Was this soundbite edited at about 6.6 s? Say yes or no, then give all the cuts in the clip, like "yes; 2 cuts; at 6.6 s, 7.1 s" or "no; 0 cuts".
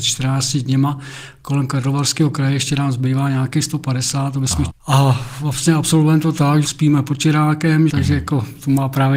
yes; 3 cuts; at 4.7 s, 6.6 s, 7.9 s